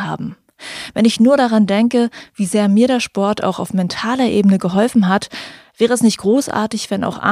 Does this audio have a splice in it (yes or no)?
no